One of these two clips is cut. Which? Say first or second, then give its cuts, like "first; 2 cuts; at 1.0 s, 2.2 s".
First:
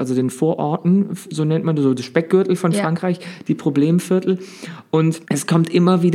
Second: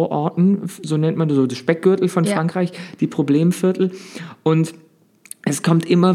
first; 1 cut; at 5.2 s